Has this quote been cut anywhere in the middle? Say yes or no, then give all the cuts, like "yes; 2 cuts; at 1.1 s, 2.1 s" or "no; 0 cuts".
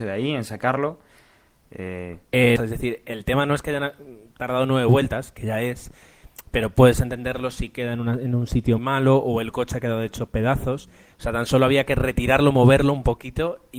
yes; 3 cuts; at 2.6 s, 8.8 s, 11.1 s